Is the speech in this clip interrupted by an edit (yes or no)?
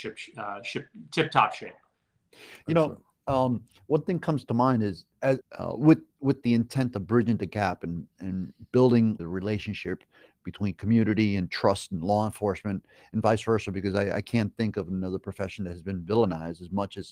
yes